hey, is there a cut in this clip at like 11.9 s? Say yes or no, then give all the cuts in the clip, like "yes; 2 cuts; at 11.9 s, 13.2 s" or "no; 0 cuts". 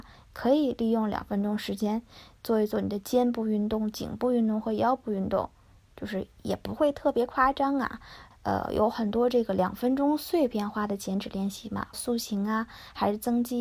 yes; 2 cuts; at 8.3 s, 11.9 s